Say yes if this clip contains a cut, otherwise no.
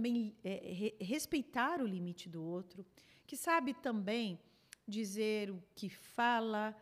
no